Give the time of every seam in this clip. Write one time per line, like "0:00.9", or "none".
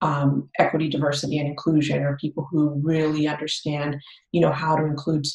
none